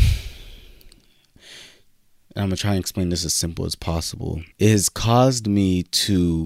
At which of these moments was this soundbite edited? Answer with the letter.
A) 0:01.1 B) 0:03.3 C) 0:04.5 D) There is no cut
C